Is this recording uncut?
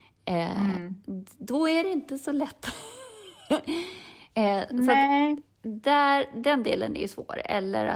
yes; 0 cuts

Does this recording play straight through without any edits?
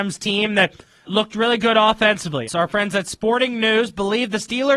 no; 2 cuts; at 1.1 s, 2.5 s

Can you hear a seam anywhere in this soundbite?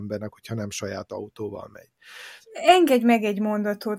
yes; 1 cut; at 2.4 s

